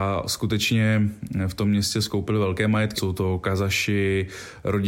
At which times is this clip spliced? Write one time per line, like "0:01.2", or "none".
0:03.0

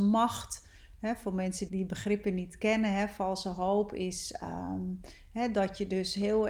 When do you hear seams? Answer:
0:01.7

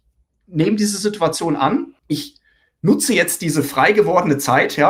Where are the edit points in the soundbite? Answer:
0:02.0

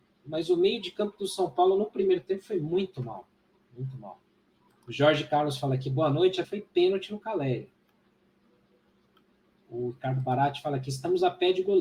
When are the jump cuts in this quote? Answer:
0:04.7
0:06.4

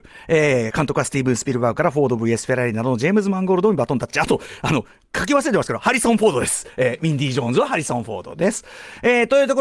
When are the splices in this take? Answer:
none

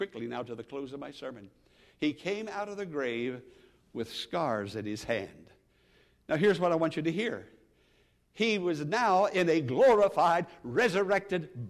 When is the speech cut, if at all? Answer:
none

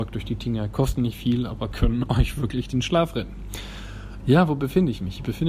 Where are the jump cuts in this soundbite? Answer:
0:04.2

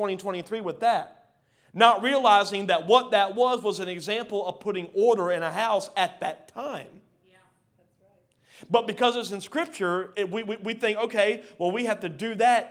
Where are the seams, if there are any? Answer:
0:10.1

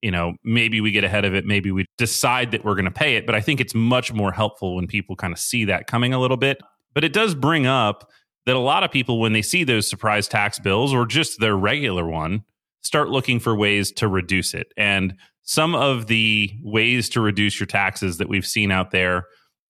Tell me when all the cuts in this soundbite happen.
0:01.8

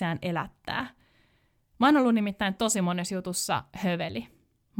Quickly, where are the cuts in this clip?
0:01.6

